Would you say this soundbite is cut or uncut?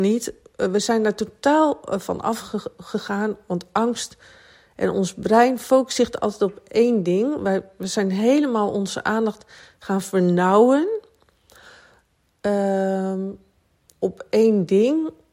uncut